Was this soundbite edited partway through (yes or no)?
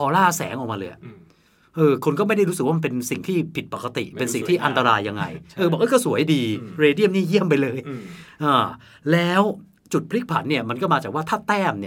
no